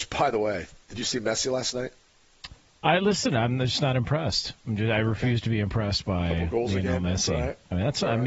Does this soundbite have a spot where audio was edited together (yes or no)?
no